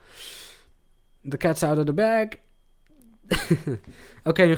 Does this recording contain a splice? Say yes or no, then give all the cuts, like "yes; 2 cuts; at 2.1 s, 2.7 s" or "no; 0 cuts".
yes; 1 cut; at 1.2 s